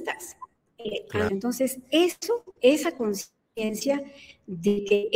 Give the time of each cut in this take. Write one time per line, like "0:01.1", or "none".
0:01.3